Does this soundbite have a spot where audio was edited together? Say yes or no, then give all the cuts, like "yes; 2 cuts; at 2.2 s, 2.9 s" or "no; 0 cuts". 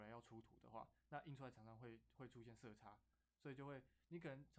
no; 0 cuts